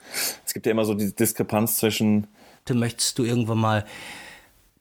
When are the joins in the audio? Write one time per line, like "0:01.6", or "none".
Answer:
0:02.7